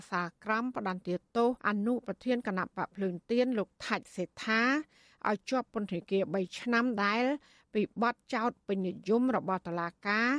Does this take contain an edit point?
yes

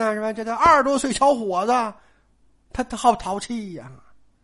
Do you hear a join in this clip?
no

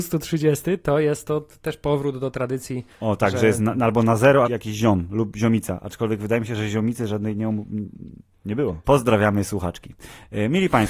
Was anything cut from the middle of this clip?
yes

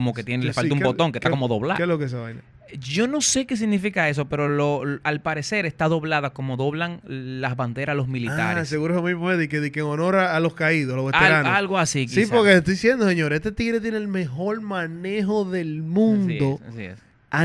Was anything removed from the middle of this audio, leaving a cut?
no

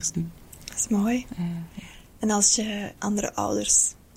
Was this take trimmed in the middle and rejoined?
yes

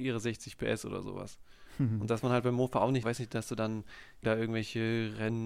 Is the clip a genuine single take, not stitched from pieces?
no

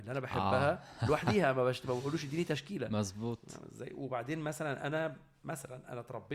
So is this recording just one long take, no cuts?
yes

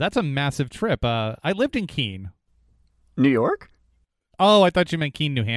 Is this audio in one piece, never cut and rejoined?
yes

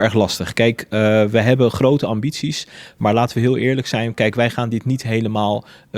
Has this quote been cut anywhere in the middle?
no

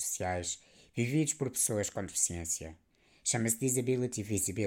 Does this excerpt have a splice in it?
no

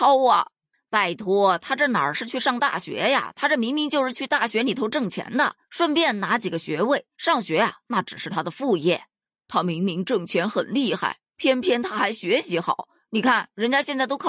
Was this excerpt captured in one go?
yes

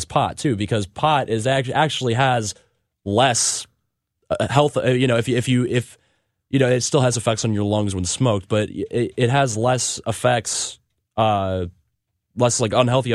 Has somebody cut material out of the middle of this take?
no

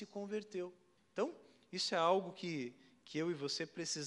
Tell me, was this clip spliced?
yes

